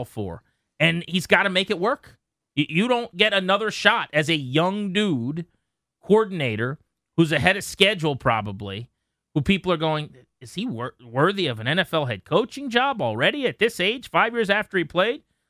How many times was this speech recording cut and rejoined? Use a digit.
0